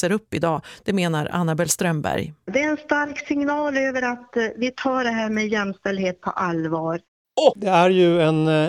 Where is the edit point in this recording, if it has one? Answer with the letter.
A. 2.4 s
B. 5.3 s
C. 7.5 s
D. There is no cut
C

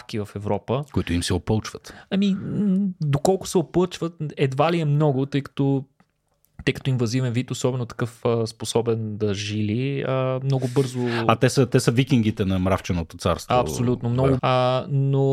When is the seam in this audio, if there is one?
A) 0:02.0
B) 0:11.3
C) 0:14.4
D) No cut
C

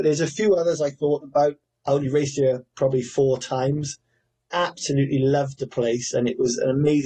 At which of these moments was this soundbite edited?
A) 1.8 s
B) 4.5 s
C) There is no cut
A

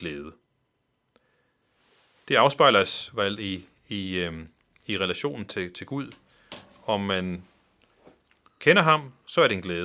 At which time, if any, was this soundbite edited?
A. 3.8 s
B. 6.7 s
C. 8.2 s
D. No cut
D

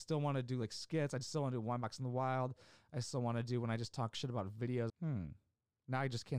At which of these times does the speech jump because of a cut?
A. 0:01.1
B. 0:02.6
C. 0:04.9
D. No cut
C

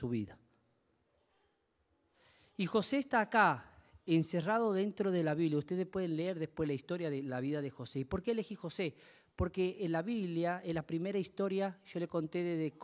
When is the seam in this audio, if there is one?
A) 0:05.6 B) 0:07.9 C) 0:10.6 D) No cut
D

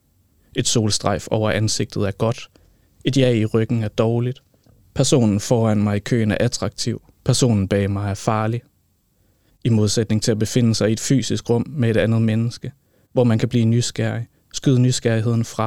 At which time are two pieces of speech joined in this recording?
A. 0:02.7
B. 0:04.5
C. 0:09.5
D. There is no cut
C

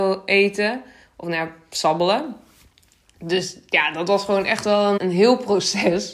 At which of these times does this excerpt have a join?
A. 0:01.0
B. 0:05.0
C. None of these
B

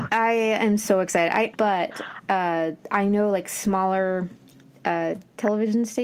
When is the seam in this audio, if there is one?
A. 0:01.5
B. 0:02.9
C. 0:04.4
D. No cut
A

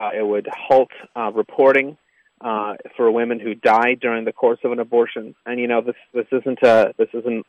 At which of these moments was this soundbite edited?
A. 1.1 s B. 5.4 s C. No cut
C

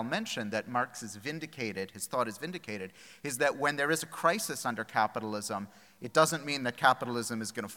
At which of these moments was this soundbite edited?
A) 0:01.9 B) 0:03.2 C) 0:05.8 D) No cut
D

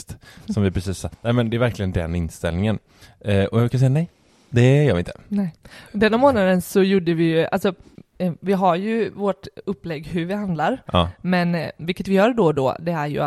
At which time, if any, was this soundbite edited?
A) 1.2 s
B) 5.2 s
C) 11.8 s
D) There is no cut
C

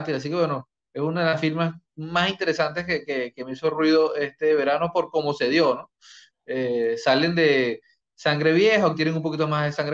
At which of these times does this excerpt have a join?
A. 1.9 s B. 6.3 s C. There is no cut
A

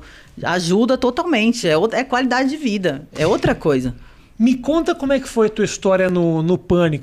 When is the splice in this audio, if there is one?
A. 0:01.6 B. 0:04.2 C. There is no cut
C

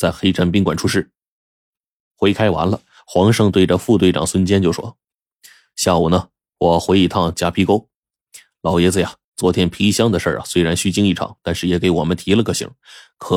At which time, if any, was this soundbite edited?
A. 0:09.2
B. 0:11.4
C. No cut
A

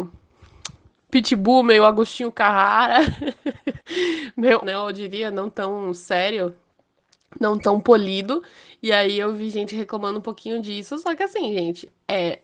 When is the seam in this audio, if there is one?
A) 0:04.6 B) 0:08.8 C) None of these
A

